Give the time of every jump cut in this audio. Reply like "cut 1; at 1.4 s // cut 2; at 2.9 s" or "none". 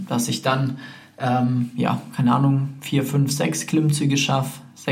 none